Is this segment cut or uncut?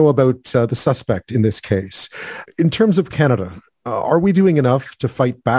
cut